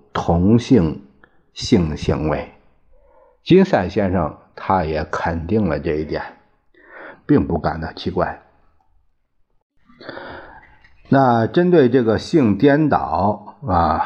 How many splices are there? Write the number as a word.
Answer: one